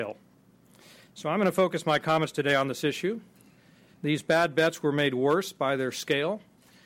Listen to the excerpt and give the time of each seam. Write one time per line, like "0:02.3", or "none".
0:03.9